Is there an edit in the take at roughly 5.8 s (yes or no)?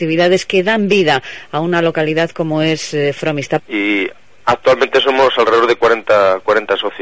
no